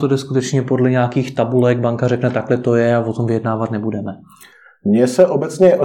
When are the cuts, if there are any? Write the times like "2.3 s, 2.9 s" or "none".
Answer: none